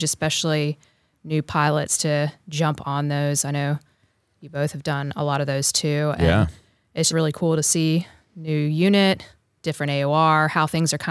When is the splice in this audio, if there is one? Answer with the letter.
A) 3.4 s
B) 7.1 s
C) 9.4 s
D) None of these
B